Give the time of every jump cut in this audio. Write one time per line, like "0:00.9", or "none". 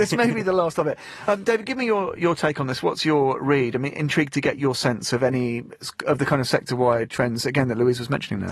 none